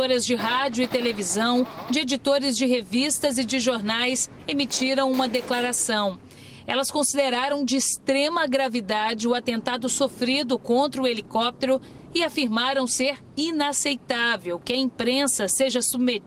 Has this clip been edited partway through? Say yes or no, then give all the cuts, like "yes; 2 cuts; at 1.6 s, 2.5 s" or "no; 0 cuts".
no; 0 cuts